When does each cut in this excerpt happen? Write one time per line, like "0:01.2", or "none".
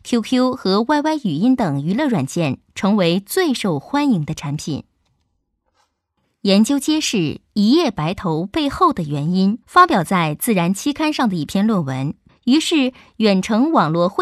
0:09.6
0:12.3